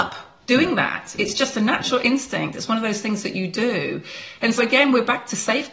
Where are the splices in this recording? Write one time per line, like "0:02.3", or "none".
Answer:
0:04.6